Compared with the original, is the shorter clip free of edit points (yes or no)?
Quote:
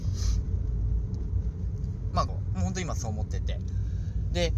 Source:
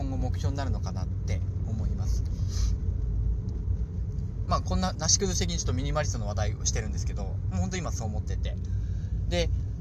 no